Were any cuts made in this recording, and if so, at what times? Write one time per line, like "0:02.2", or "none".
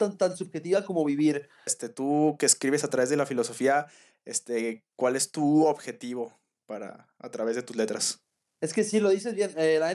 0:01.7